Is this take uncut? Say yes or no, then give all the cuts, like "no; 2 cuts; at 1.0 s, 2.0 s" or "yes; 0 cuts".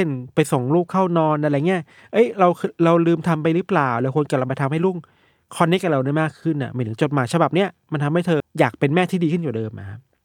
no; 1 cut; at 8.4 s